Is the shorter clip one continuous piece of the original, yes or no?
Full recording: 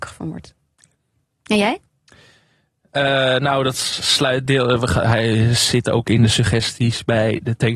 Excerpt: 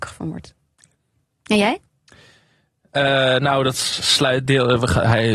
yes